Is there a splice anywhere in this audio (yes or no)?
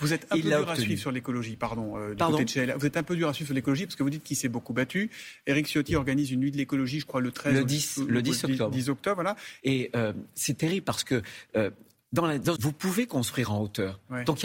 yes